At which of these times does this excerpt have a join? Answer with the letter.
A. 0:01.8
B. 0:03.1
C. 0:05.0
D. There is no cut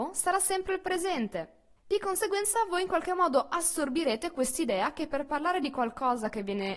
A